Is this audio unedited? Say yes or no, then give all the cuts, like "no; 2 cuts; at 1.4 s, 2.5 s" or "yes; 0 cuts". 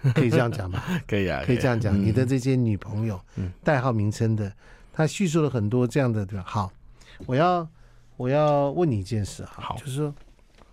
yes; 0 cuts